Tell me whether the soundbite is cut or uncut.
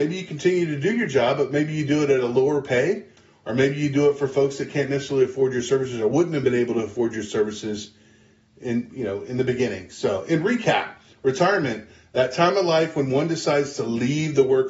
uncut